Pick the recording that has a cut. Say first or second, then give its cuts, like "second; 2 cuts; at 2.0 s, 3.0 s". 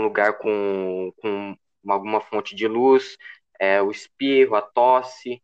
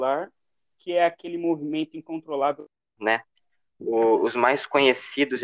second; 1 cut; at 3.0 s